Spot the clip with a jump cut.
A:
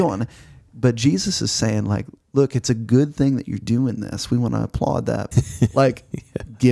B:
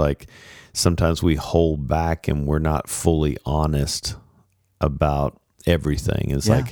A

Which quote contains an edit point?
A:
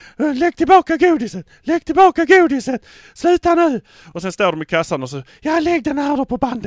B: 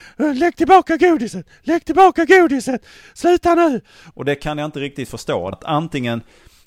B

